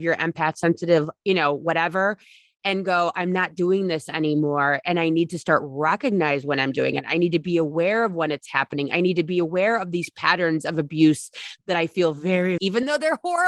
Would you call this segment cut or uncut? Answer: cut